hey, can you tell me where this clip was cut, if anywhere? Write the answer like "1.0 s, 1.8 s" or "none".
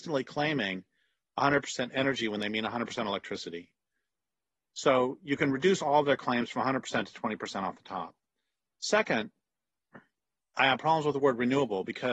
none

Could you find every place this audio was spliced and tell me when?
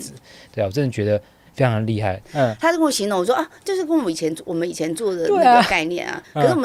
2.2 s

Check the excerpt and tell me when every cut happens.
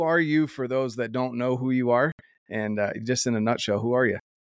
none

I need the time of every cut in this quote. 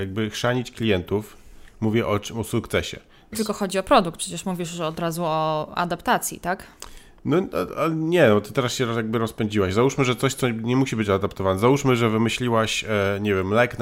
3.3 s

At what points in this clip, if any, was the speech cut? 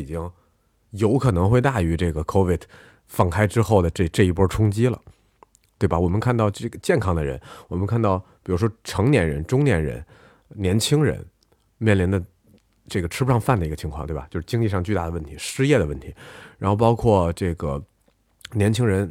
none

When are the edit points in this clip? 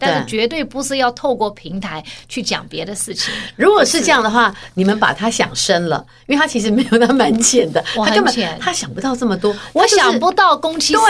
none

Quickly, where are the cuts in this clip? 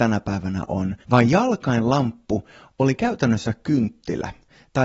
1.0 s

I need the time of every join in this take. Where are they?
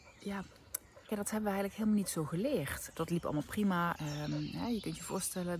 1.1 s, 2.9 s, 4.0 s

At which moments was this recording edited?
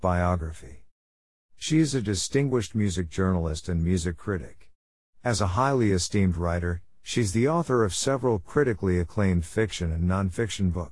1.4 s

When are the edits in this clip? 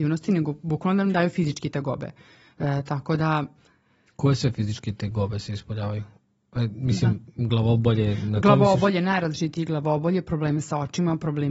none

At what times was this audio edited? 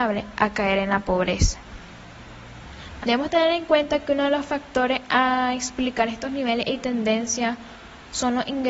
3.0 s

